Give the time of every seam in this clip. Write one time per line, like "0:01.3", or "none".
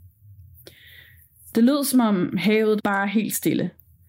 0:02.8